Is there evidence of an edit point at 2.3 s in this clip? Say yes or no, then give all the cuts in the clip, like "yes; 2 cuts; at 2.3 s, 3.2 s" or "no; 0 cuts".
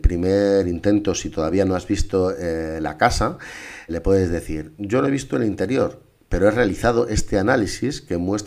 no; 1 cut; at 3.9 s